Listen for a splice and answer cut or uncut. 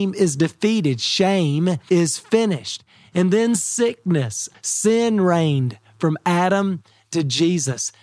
cut